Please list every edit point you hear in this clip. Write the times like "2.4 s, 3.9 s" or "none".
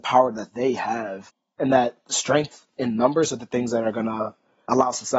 none